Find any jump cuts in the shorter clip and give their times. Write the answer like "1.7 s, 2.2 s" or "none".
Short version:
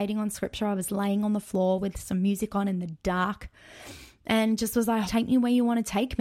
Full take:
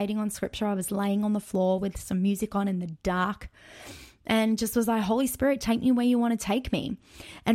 5.0 s